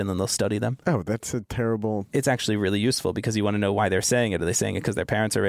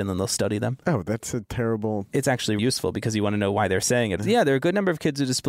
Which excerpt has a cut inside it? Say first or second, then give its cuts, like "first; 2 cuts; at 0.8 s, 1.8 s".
second; 2 cuts; at 2.6 s, 4.2 s